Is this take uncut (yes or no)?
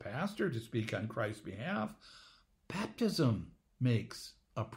yes